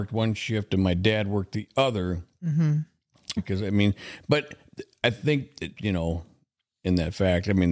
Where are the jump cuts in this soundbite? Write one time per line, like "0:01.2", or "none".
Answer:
0:03.4
0:05.8